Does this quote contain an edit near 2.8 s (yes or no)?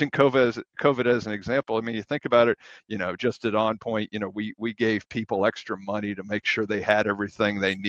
yes